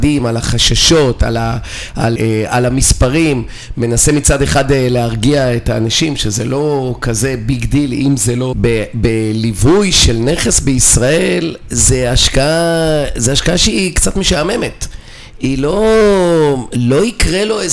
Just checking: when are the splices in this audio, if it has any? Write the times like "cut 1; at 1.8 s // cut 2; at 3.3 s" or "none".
cut 1; at 2.2 s // cut 2; at 8.5 s